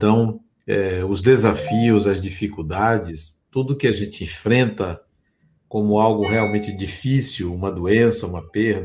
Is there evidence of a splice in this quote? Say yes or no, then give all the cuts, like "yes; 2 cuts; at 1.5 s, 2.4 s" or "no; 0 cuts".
no; 0 cuts